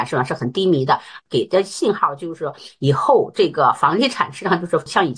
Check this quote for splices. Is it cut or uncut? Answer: cut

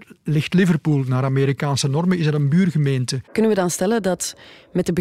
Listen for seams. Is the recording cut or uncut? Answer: cut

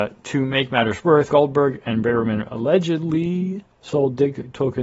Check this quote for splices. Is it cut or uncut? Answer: cut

